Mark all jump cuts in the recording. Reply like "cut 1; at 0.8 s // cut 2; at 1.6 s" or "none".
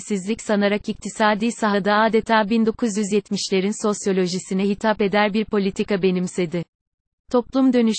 none